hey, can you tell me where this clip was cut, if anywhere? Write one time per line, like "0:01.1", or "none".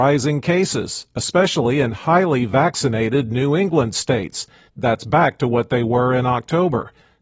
0:04.7